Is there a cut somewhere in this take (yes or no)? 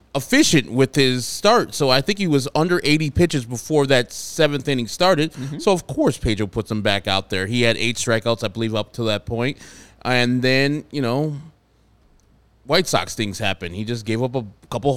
no